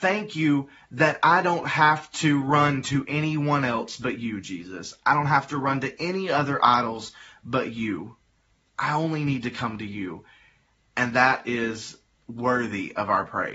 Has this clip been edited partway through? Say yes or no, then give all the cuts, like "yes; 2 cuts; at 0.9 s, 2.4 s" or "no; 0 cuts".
no; 0 cuts